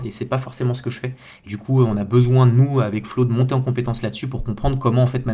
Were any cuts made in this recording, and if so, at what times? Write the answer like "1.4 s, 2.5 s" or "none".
1.5 s